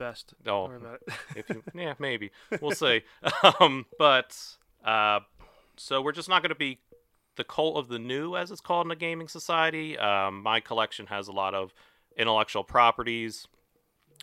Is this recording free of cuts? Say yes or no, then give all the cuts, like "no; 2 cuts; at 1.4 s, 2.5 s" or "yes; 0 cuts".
no; 1 cut; at 3.9 s